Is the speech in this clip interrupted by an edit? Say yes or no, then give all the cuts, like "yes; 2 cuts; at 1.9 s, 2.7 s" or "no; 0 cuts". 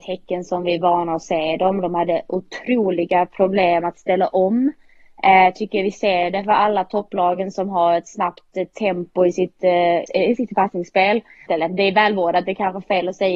yes; 2 cuts; at 10.1 s, 11.5 s